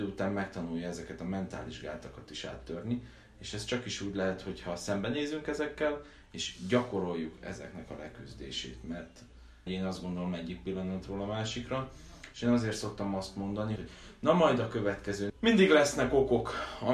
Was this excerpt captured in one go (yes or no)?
no